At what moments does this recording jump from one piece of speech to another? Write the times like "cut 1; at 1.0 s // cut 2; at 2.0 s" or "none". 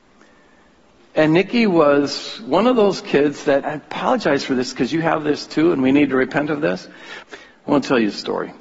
cut 1; at 3.6 s // cut 2; at 7.2 s